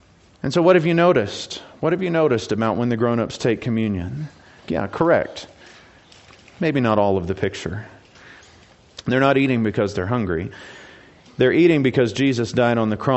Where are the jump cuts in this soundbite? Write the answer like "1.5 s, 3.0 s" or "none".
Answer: 4.6 s, 9.0 s